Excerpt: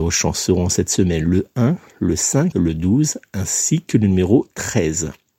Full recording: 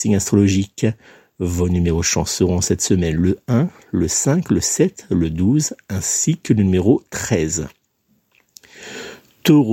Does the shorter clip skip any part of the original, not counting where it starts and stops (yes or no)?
yes